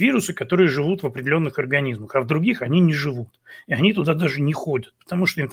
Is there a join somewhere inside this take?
no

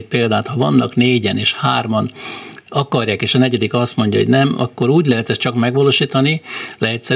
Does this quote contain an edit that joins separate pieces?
no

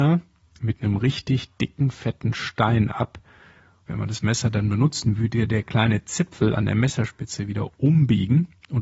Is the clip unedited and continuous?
no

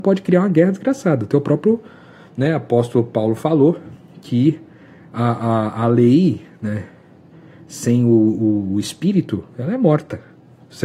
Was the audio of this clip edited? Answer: no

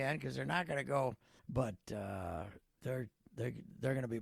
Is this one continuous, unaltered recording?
no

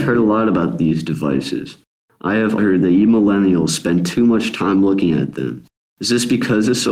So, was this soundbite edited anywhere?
yes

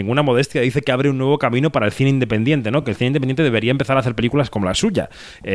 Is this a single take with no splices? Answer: yes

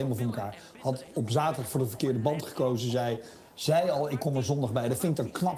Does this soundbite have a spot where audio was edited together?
no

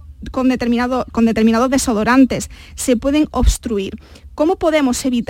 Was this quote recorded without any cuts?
no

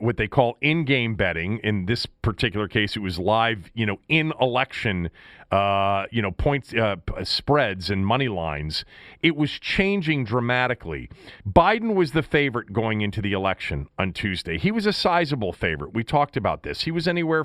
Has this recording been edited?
yes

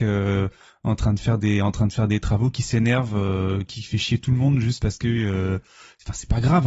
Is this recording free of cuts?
yes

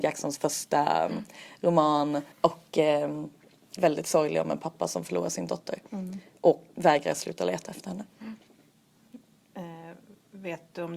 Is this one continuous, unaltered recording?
no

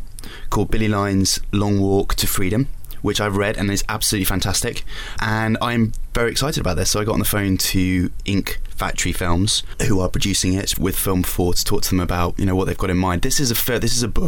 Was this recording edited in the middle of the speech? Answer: yes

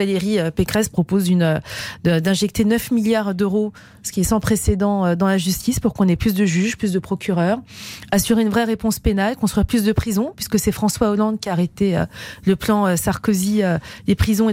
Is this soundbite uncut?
yes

